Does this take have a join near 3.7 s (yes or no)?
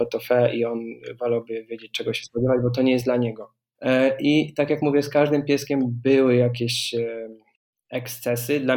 yes